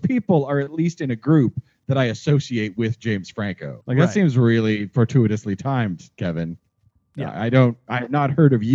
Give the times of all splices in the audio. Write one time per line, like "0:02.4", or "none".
0:03.8